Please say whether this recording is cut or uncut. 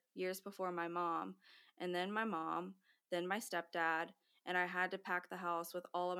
uncut